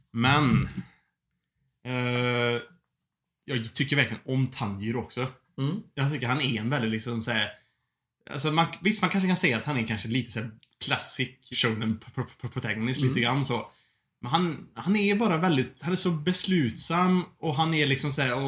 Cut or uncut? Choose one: cut